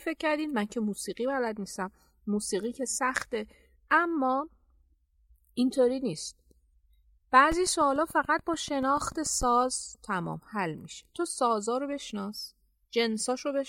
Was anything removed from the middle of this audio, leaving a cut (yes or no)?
no